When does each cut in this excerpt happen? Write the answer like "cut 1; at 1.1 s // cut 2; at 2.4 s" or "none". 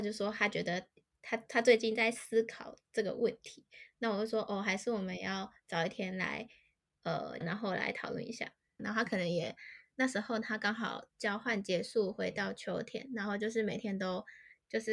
cut 1; at 7.4 s // cut 2; at 8.8 s